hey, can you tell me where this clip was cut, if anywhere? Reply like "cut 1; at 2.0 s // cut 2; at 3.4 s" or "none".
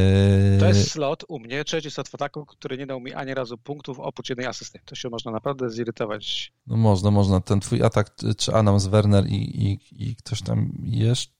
cut 1; at 6.6 s